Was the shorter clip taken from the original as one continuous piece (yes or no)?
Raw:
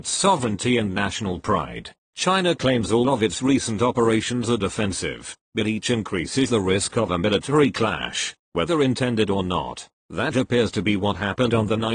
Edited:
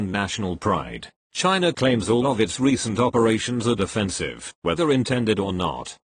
no